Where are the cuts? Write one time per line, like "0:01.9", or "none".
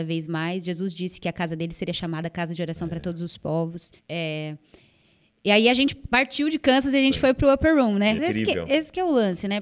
0:04.0
0:08.2